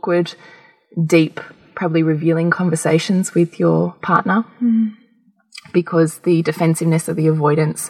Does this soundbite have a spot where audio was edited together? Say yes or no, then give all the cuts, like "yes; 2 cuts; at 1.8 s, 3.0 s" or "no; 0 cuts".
no; 0 cuts